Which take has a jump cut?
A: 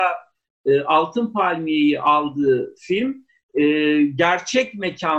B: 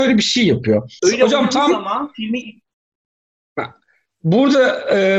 B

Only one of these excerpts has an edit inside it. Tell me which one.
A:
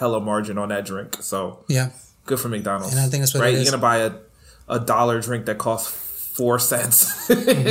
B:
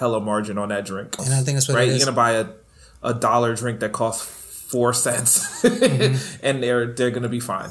B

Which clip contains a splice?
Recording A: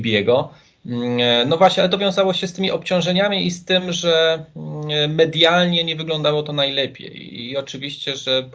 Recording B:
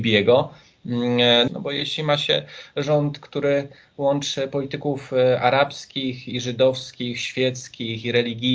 B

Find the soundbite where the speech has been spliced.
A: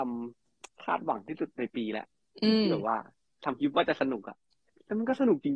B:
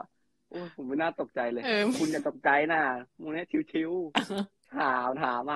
B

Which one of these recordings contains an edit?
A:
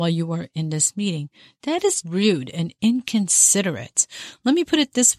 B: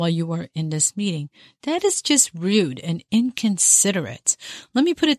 A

